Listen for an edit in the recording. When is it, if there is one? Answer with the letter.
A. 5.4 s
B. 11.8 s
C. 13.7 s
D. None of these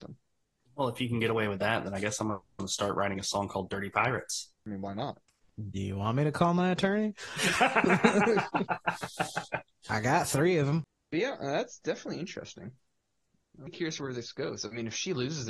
C